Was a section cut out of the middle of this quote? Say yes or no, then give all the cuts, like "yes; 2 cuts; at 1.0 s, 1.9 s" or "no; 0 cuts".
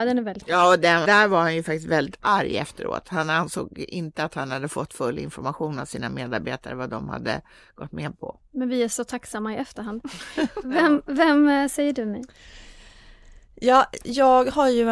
yes; 1 cut; at 1.0 s